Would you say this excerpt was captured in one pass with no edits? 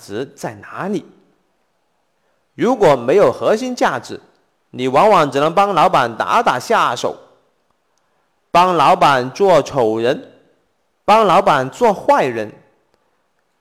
yes; 0 cuts

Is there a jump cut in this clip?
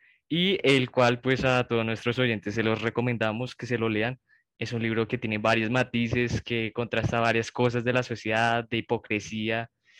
no; 0 cuts

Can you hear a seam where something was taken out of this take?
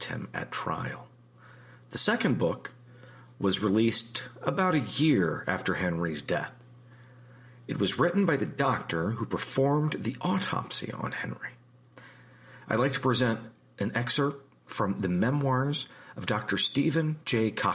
no; 0 cuts

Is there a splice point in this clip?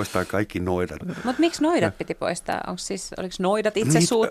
yes; 1 cut; at 1.0 s

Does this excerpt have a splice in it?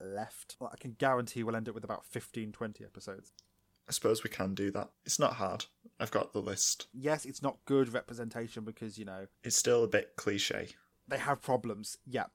yes; 2 cuts; at 5.0 s, 6.9 s

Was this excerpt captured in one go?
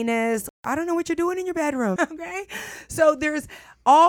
no; 1 cut; at 2.0 s

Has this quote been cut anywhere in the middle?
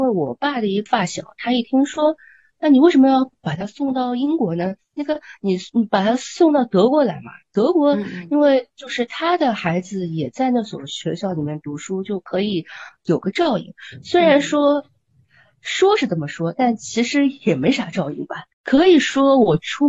yes; 1 cut; at 18.5 s

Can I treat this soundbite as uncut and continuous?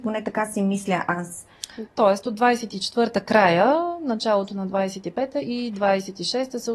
no; 1 cut; at 1.9 s

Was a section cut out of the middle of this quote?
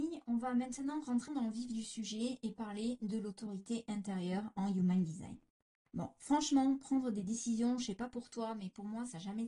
yes; 1 cut; at 1.3 s

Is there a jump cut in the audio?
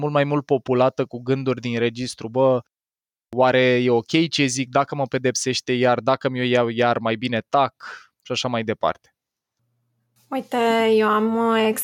no; 0 cuts

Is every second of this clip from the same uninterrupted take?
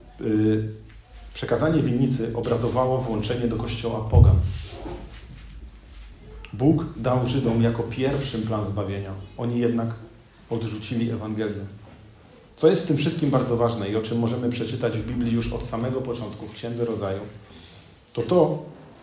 yes; 0 cuts

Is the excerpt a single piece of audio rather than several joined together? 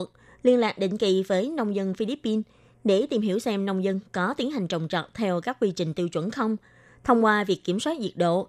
yes; 0 cuts

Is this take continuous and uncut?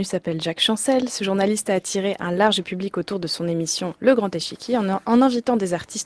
yes; 0 cuts

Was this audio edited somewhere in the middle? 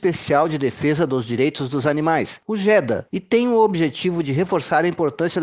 yes; 1 cut; at 3.1 s

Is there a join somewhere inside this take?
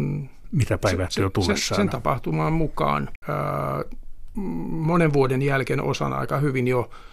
yes; 1 cut; at 3.2 s

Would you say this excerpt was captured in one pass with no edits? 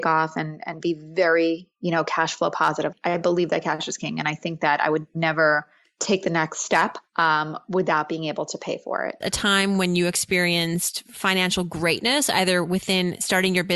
no; 1 cut; at 9.2 s

